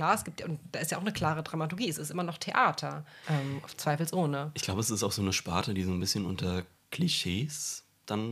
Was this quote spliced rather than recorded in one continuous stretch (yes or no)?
yes